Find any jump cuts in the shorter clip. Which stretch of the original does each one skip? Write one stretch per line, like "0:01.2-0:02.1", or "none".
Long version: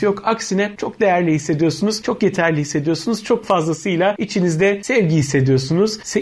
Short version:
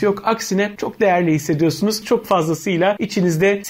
0:02.0-0:03.2